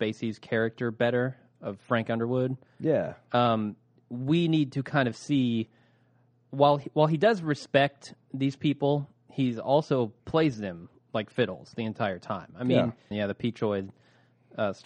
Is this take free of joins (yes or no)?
no